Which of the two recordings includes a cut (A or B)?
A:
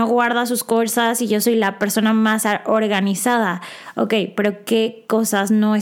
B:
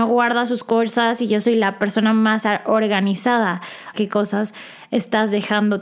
B